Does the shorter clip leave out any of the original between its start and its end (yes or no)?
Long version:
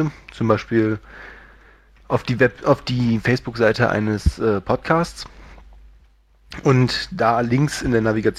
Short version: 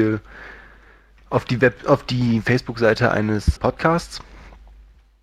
yes